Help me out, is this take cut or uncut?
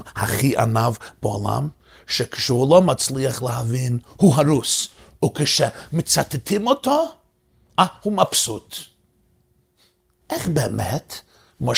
cut